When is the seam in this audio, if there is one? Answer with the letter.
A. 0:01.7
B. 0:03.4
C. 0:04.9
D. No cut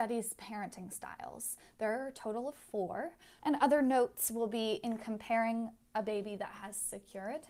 B